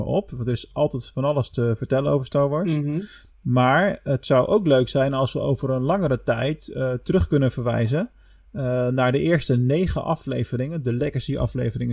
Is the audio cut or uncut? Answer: uncut